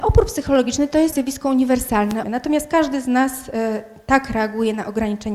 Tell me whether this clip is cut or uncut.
cut